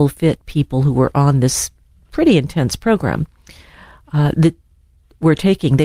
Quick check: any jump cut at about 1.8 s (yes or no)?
no